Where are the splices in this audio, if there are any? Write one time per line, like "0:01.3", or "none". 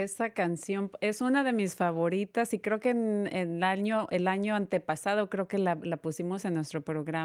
none